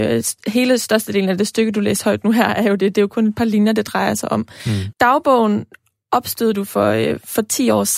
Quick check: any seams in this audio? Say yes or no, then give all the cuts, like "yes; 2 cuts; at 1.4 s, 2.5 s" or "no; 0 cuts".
yes; 1 cut; at 4.9 s